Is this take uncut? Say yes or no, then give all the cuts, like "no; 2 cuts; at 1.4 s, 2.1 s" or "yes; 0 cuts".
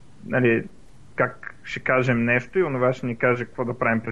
yes; 0 cuts